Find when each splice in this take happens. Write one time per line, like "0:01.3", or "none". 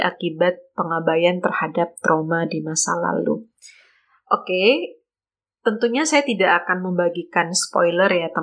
none